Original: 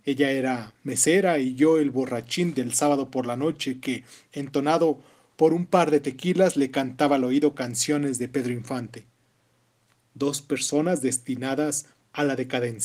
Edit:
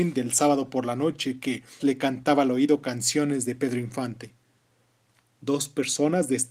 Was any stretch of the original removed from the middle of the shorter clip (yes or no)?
yes